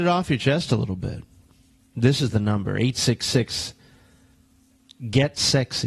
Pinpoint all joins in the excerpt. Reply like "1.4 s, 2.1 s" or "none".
none